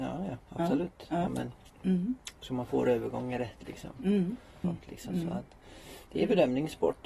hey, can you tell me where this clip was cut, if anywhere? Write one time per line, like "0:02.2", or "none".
0:01.3
0:04.6